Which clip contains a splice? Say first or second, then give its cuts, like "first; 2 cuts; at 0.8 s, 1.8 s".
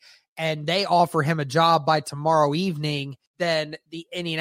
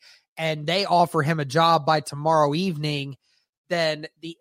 first; 1 cut; at 3.3 s